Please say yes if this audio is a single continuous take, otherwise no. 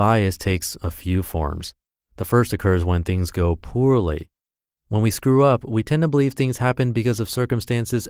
yes